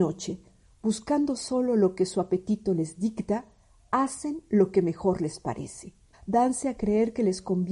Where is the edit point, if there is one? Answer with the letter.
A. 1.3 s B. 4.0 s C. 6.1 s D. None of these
C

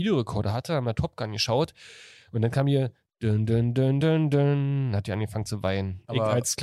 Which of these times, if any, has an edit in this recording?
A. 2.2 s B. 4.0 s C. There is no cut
C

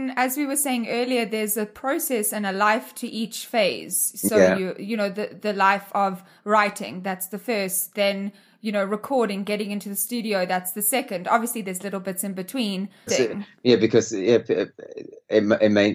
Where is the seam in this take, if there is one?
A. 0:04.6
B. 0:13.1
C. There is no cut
B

